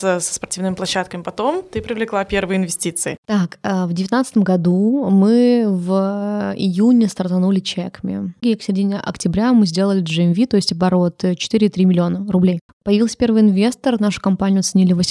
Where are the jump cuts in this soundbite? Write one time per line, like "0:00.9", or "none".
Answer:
0:03.2
0:08.4
0:12.7